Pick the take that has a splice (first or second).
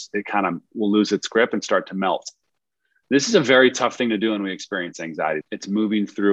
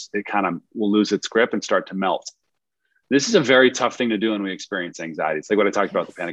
first